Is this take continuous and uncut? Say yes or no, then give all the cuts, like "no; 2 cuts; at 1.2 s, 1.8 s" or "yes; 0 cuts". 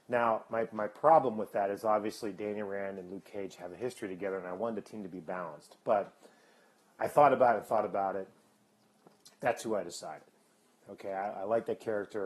yes; 0 cuts